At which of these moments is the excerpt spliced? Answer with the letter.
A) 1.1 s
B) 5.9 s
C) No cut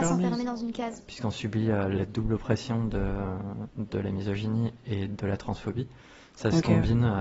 A